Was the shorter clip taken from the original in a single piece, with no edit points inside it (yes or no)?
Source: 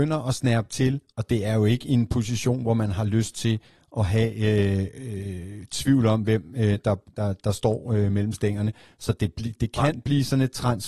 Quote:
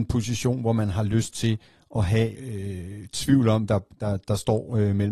no